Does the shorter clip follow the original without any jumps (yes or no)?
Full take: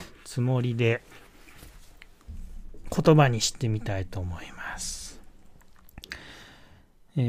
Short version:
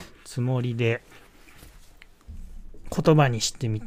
yes